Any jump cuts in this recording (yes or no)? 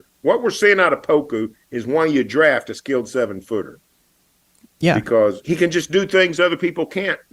yes